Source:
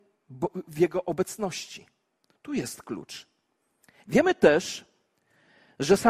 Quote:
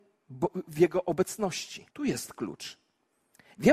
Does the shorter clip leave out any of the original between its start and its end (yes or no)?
yes